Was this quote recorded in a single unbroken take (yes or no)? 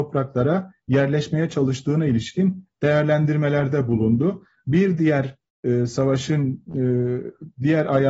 yes